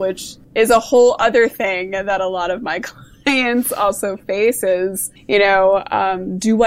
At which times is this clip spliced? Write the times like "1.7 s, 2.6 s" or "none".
none